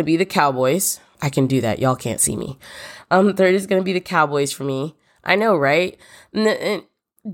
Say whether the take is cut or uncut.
cut